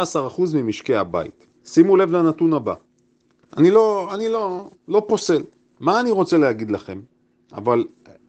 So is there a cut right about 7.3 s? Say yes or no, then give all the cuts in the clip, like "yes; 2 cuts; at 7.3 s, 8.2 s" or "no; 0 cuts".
no; 1 cut; at 3.5 s